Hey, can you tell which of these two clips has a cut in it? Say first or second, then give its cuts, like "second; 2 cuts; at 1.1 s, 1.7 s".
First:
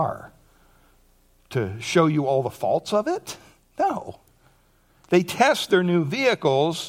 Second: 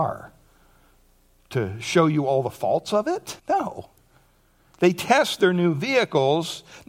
second; 1 cut; at 3.4 s